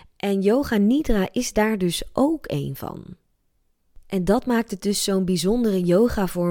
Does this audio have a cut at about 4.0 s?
no; 0 cuts

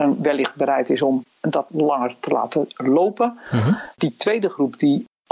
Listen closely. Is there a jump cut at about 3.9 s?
yes; 1 cut; at 3.9 s

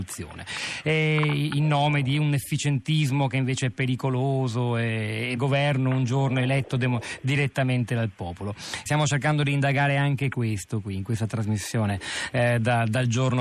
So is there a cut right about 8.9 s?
yes; 2 cuts; at 5.4 s, 8.9 s

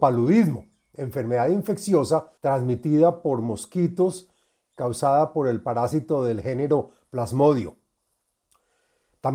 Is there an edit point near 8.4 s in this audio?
no; 1 cut; at 2.4 s

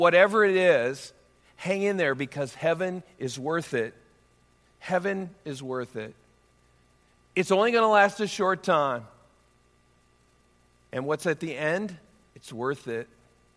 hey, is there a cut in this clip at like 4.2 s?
no; 1 cut; at 12.3 s

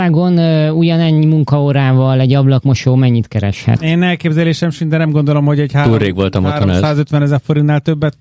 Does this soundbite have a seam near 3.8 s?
no; 0 cuts

